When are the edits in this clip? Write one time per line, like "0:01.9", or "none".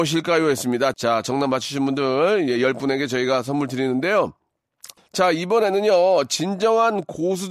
0:00.9
0:05.0